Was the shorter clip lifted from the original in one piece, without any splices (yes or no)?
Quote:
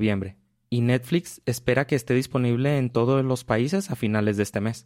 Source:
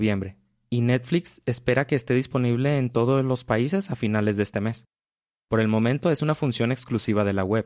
yes